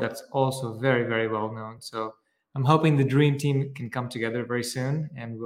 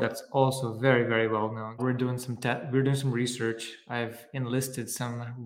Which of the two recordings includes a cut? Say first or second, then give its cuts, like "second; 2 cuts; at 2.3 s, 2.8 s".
second; 1 cut; at 1.8 s